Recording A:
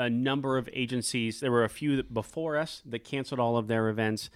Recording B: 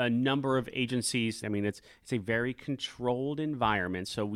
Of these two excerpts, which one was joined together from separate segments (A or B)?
B